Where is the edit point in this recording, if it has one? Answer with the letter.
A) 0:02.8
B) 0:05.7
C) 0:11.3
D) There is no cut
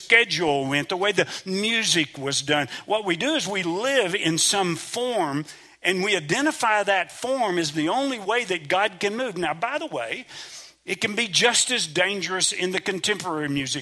D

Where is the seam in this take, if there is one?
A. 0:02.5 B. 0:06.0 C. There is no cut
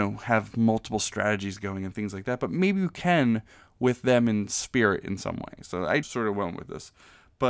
B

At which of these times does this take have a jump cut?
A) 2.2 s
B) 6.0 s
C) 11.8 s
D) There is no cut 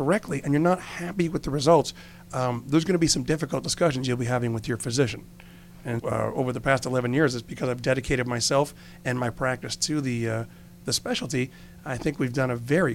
B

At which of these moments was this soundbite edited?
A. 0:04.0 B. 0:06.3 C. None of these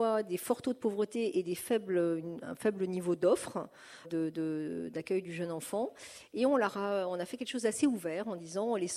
A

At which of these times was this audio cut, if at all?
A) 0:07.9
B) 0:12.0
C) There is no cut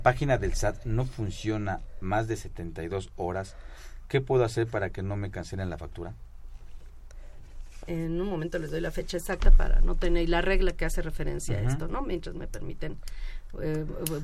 A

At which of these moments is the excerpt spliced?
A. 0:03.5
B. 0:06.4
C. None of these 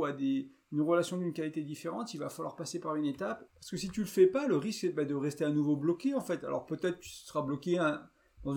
A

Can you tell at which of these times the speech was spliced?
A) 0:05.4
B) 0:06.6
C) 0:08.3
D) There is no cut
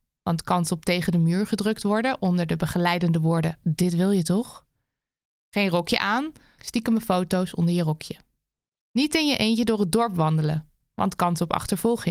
B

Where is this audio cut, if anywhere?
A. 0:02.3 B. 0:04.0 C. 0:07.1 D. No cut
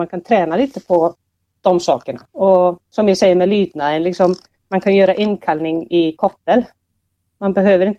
A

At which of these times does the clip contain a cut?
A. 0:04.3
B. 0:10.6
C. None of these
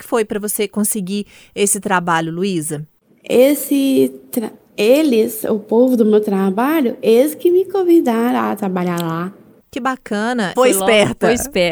B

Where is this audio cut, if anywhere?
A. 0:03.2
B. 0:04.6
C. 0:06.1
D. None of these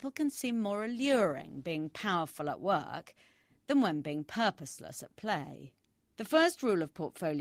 C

